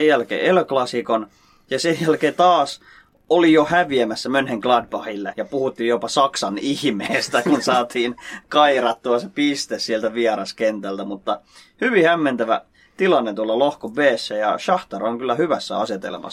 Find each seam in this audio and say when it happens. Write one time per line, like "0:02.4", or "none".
0:05.3